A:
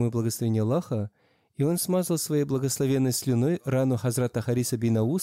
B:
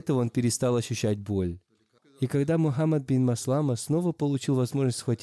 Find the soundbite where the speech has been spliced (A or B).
B